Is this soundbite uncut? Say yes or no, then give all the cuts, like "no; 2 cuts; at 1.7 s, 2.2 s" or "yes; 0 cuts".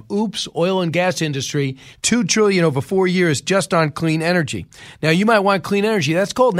no; 1 cut; at 1.9 s